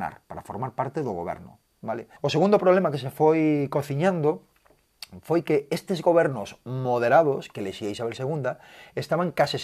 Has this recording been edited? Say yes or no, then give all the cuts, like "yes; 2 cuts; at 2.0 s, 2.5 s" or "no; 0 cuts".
yes; 1 cut; at 2.2 s